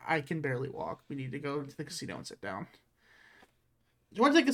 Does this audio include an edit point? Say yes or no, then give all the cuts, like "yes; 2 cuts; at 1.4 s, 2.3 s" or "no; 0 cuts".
no; 0 cuts